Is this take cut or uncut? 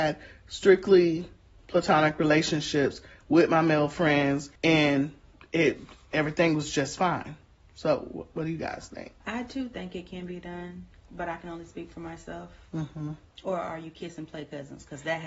cut